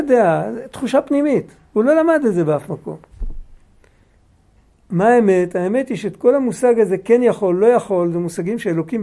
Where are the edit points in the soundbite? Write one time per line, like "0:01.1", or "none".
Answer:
none

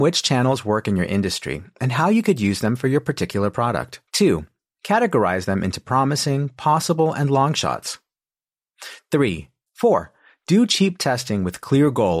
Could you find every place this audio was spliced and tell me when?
0:04.1
0:09.7

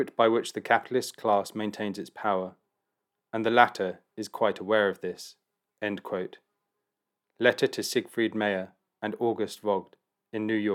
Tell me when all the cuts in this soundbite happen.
none

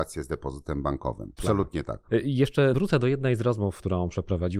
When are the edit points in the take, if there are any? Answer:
0:01.4

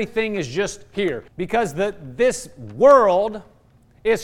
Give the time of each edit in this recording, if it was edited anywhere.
0:01.3

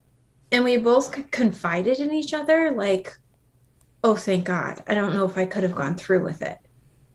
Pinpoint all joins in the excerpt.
none

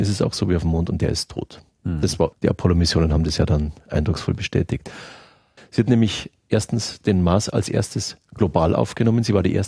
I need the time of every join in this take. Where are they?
0:02.3
0:05.6

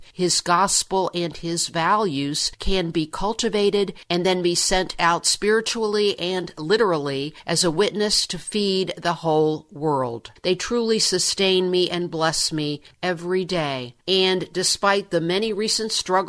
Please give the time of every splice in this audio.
0:10.4

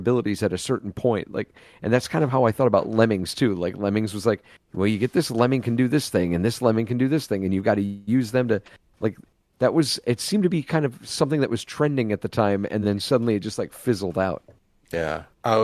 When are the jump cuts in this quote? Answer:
none

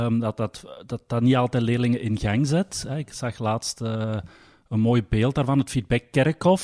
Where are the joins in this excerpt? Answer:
none

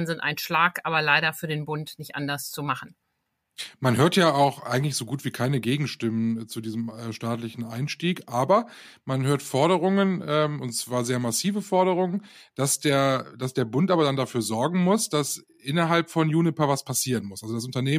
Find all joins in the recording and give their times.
none

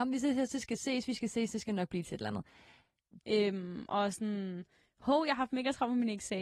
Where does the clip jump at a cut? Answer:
0:03.2

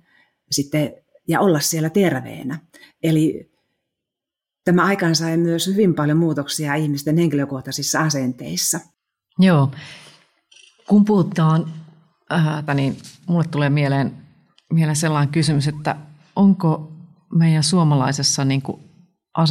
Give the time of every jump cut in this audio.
0:12.7

